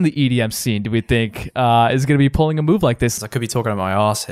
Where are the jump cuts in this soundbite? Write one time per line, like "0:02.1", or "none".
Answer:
0:03.2